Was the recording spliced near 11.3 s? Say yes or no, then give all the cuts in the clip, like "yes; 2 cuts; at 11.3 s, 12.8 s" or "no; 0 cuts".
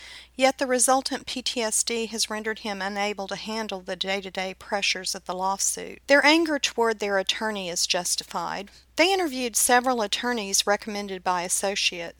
no; 2 cuts; at 6.0 s, 8.8 s